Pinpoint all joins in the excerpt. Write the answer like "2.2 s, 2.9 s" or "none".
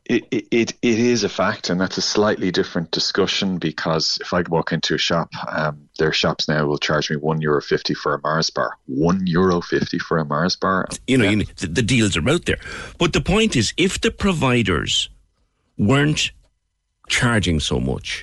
10.9 s